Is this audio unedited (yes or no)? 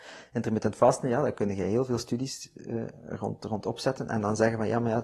yes